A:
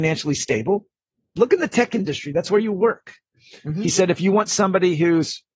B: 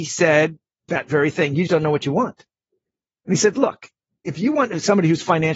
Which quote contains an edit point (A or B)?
B